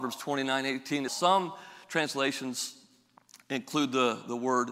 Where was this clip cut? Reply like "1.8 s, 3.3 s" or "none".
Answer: 1.1 s

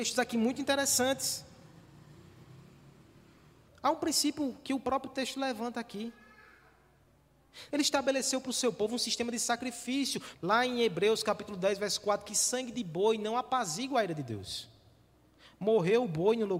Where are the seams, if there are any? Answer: 3.7 s, 7.7 s, 10.3 s

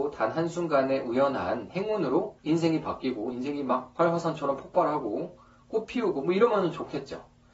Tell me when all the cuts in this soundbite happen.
none

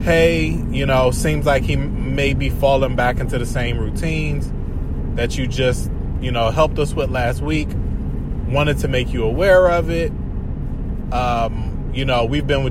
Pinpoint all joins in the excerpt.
none

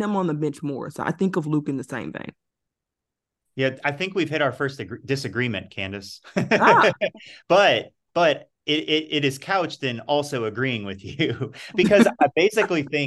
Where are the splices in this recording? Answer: 3.8 s

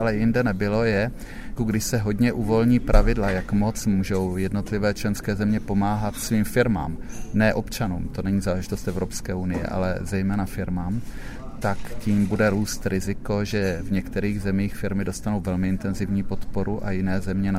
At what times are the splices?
1.6 s

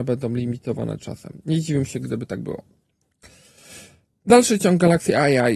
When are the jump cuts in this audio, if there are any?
none

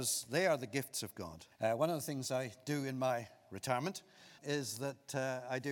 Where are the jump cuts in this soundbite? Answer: 1.5 s, 4.4 s

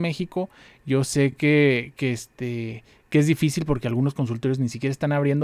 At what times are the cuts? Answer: none

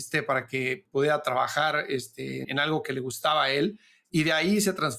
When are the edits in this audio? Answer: 2.4 s

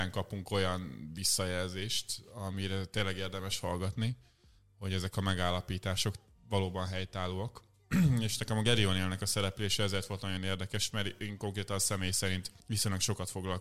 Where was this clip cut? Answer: 12.6 s

